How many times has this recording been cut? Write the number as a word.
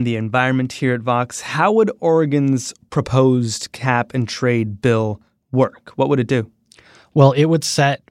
zero